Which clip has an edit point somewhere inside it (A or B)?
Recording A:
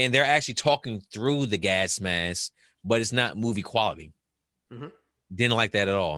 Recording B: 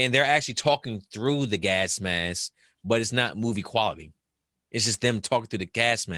A